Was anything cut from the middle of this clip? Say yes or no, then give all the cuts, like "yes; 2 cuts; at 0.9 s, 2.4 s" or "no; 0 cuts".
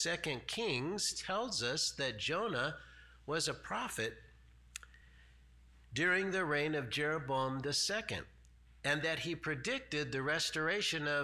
no; 0 cuts